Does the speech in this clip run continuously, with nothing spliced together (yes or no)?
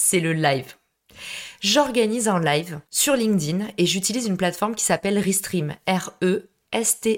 no